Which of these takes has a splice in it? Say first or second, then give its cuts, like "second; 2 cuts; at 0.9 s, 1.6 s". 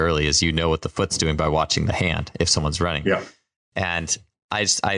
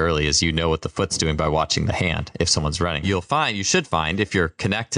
second; 1 cut; at 3.0 s